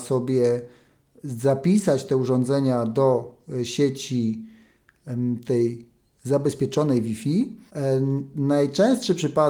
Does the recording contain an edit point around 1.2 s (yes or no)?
no